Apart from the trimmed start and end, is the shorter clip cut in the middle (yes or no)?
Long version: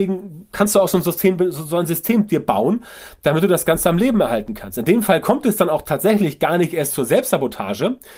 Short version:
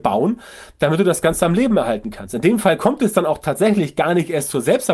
no